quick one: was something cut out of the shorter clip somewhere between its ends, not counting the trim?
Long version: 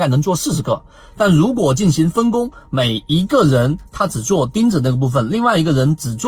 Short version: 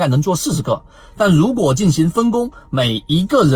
no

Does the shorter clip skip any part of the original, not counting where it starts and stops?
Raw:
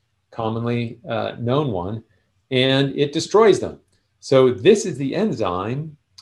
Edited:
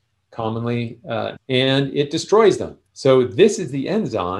yes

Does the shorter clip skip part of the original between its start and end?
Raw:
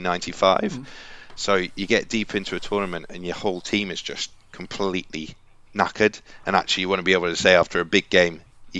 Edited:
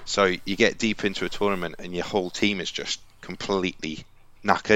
no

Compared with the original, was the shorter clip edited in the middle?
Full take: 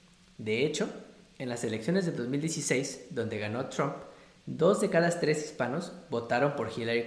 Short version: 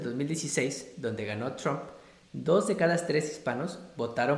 no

